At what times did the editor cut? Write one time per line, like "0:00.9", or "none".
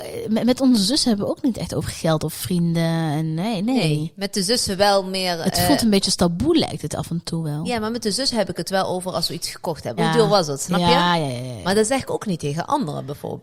0:10.0